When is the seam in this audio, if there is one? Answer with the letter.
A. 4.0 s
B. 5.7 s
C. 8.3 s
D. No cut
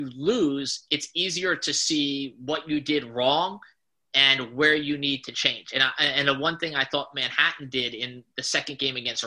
D